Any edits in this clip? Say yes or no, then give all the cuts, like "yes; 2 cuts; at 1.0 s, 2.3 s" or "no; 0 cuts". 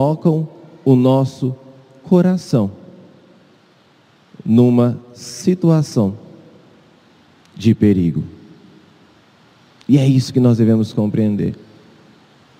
no; 0 cuts